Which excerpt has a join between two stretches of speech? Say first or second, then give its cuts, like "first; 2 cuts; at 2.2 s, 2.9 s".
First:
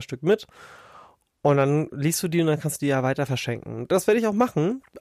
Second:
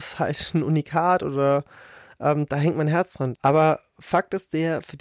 second; 1 cut; at 3.3 s